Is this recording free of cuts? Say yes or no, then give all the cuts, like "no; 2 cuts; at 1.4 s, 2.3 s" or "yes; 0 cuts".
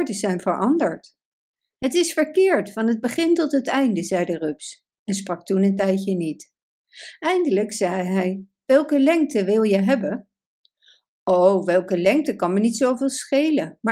yes; 0 cuts